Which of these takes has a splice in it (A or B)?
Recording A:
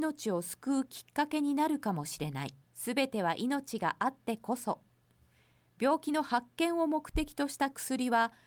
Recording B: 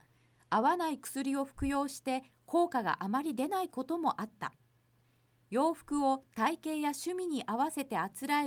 A